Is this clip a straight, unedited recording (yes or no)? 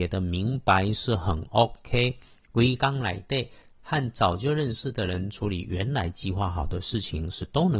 yes